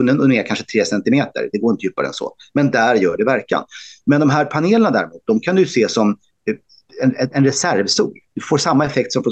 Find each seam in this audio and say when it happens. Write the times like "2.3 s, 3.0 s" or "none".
none